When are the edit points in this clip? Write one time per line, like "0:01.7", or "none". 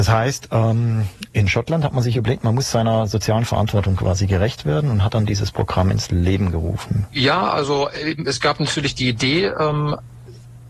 0:07.1